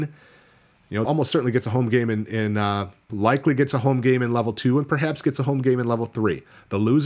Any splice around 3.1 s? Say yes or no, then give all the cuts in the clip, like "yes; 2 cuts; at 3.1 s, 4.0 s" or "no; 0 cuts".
yes; 2 cuts; at 1.0 s, 3.1 s